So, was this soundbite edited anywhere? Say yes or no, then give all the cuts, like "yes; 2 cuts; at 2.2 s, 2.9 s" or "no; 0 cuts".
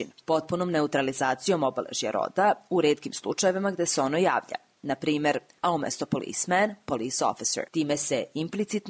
yes; 2 cuts; at 5.6 s, 7.7 s